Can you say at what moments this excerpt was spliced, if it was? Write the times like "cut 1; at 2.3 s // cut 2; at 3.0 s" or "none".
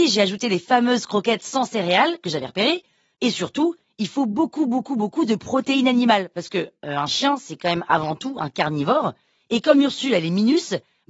cut 1; at 3.1 s